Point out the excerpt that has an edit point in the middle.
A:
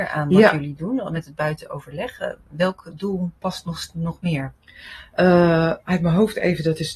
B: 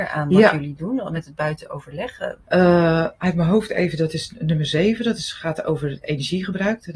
B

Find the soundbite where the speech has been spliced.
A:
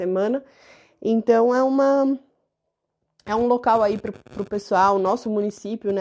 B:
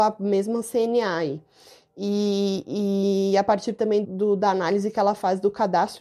B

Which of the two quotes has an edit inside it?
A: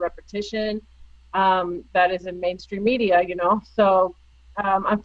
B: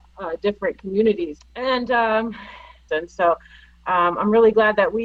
B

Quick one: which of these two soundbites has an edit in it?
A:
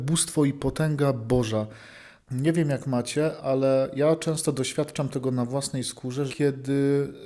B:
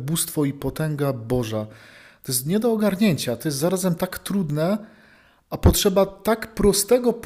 A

